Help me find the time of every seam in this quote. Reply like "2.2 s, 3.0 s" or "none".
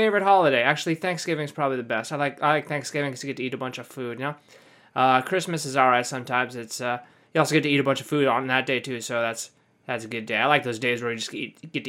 none